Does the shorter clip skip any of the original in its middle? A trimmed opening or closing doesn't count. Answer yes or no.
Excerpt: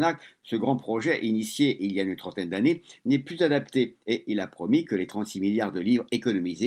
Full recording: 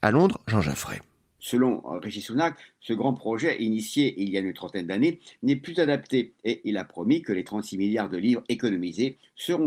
no